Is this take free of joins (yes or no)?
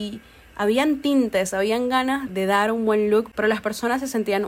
no